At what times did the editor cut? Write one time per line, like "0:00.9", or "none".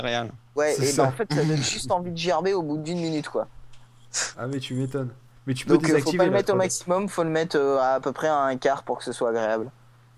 none

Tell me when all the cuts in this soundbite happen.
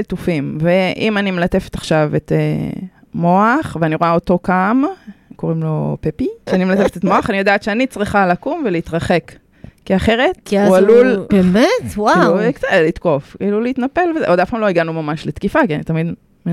0:06.5
0:11.3

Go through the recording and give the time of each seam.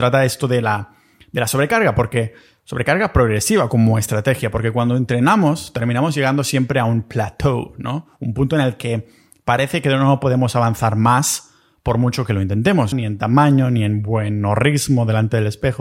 0:12.9

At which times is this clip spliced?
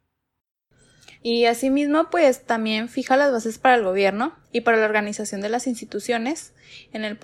0:01.2
0:04.4

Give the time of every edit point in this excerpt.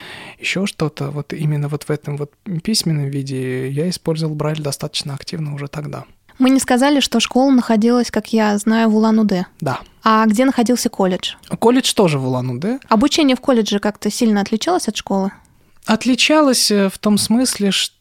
none

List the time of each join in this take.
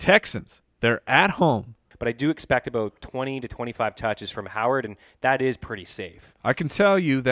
0:01.9

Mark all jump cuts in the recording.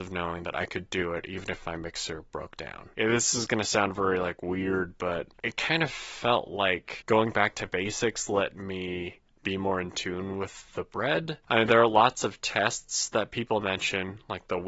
none

